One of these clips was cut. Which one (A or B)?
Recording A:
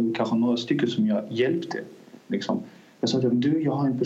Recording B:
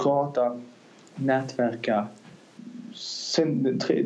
A